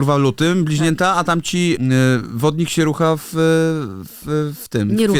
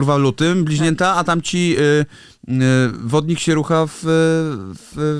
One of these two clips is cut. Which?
first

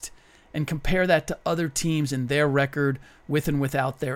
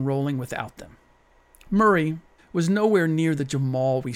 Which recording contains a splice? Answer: second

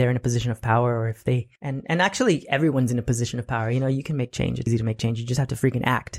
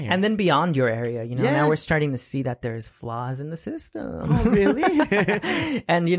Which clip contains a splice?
first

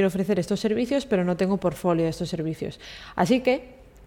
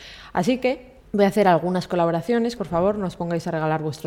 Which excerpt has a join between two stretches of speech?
second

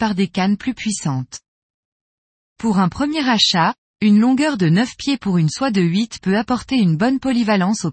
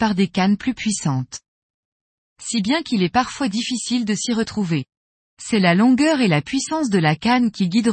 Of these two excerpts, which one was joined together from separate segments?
second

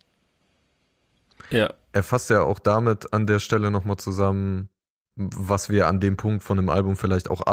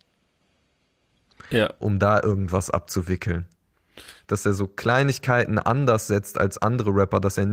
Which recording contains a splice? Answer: second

